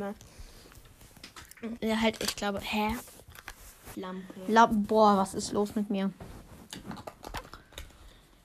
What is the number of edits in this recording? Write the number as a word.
two